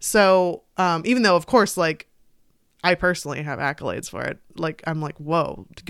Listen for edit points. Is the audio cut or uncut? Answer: uncut